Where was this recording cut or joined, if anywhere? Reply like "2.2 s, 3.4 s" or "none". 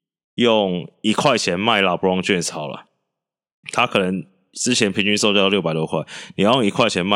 none